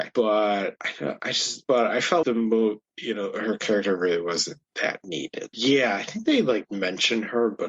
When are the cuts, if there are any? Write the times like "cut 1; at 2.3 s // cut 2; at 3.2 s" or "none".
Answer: cut 1; at 2.2 s // cut 2; at 5.5 s

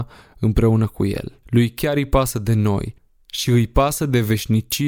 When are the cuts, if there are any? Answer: cut 1; at 1.4 s

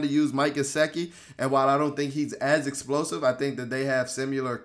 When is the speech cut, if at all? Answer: none

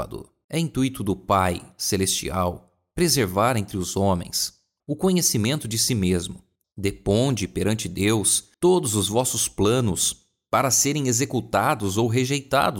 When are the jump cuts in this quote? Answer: cut 1; at 4.8 s // cut 2; at 6.6 s // cut 3; at 8.5 s

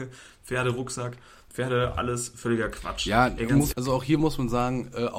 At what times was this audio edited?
cut 1; at 3.7 s

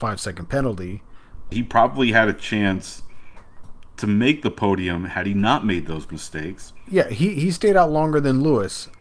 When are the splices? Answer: cut 1; at 1.5 s // cut 2; at 6.9 s

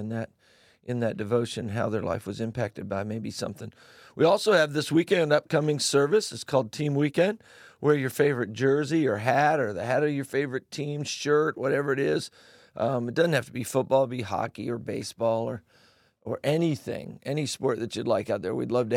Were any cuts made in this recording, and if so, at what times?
none

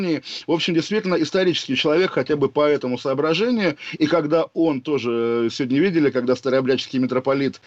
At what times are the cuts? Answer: none

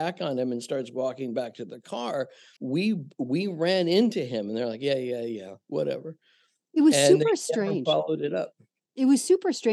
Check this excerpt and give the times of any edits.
cut 1; at 2.6 s

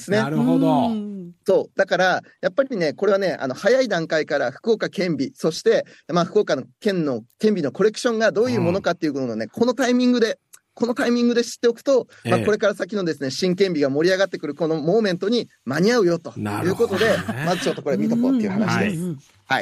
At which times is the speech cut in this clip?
none

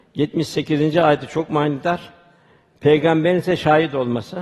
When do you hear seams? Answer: none

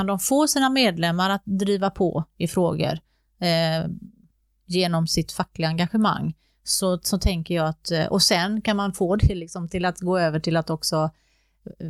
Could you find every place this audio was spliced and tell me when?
none

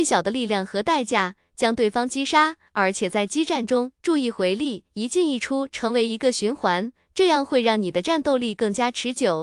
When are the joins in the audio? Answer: none

